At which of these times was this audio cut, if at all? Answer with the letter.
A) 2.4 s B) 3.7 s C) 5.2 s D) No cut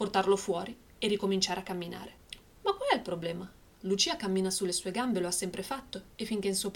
A